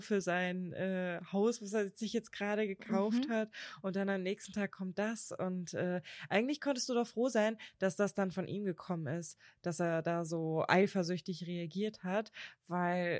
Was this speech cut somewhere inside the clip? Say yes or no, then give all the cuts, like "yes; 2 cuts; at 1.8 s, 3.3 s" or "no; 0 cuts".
no; 0 cuts